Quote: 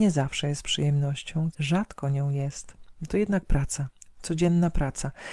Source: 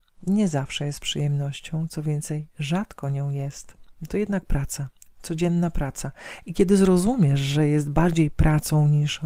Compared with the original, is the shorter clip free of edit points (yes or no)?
no